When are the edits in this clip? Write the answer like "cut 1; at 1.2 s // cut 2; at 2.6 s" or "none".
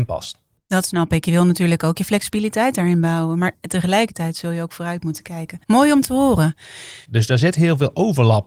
cut 1; at 5.6 s // cut 2; at 7.0 s